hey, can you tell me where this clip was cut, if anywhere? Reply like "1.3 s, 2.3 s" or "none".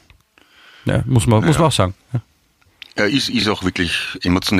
none